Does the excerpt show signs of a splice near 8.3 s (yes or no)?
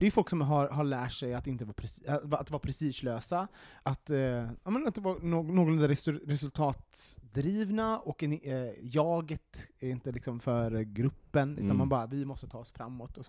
no